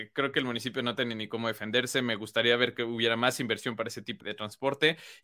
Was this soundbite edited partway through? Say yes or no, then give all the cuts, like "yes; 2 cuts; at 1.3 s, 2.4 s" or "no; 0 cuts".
yes; 1 cut; at 4.2 s